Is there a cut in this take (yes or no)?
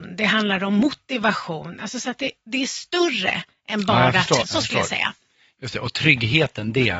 yes